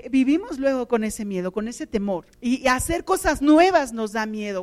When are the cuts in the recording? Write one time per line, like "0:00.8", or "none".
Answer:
0:02.3